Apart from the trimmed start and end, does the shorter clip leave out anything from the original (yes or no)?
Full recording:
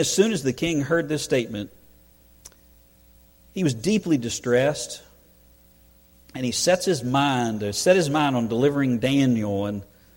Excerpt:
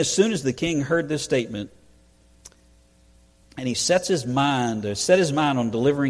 yes